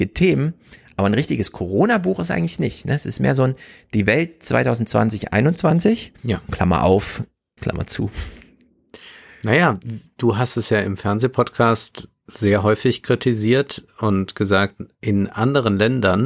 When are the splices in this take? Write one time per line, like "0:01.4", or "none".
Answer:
0:06.2
0:07.6